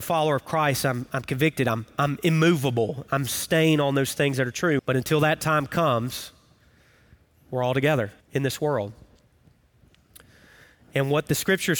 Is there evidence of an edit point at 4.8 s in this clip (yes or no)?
yes